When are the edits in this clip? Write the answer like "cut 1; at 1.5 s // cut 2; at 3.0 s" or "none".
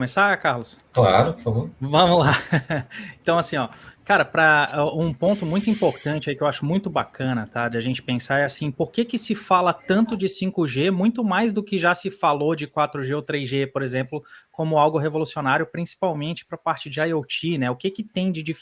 none